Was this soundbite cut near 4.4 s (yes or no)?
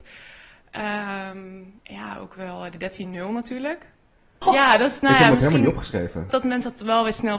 yes